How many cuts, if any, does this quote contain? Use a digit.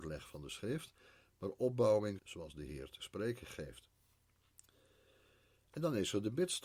1